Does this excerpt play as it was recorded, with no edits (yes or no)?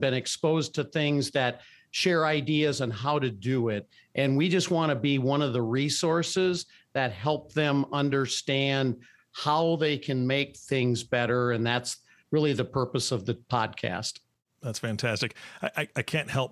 yes